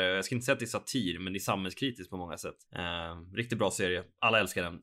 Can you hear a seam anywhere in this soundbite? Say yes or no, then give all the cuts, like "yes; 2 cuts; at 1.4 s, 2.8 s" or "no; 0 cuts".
yes; 1 cut; at 2.7 s